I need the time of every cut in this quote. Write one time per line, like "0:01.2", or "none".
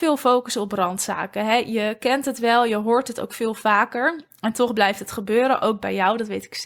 none